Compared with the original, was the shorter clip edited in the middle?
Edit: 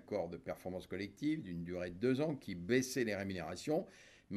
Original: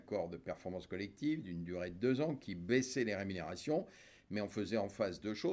no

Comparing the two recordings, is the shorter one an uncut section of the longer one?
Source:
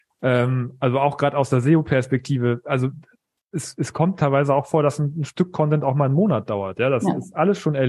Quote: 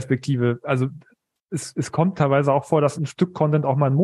no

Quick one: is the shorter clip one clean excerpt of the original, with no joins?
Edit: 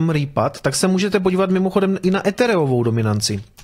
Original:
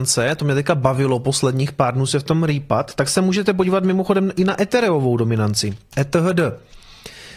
yes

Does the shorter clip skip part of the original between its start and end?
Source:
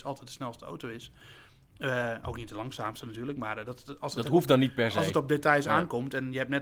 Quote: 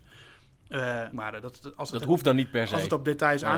yes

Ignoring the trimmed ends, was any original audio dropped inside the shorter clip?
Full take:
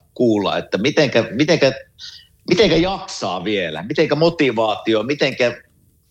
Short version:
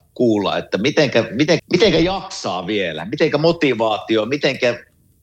yes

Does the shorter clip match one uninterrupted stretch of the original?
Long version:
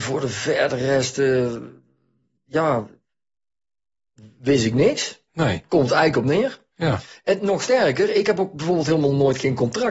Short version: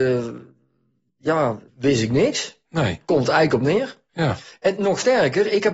no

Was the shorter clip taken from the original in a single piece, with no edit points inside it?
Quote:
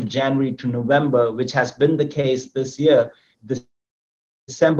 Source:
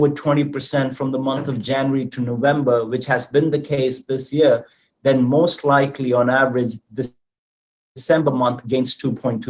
no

